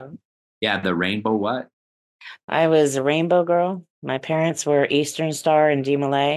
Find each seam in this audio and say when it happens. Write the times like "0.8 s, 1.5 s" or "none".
none